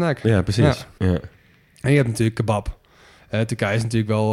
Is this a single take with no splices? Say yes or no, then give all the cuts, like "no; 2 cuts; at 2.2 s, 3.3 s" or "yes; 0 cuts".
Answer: no; 1 cut; at 1.0 s